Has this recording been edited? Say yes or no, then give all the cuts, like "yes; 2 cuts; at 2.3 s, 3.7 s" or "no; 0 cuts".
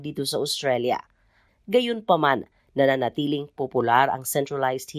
yes; 1 cut; at 1.5 s